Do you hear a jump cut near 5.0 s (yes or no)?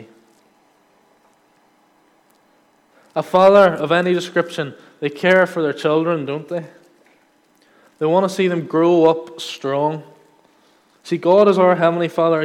no